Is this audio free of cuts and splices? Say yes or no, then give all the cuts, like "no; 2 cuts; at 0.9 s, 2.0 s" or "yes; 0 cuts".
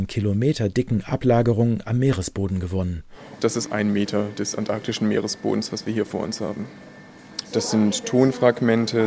no; 2 cuts; at 3.7 s, 7.4 s